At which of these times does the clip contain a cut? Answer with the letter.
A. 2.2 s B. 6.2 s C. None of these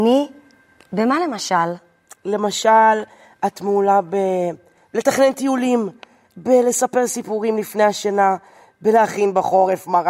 B